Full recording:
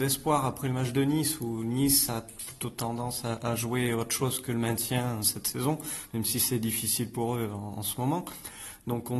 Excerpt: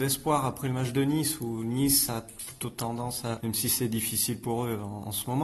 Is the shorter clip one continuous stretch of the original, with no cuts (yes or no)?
no